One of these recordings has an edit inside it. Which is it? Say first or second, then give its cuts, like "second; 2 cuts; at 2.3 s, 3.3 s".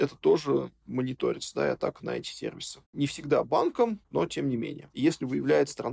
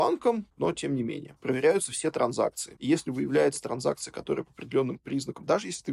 first; 1 cut; at 4.9 s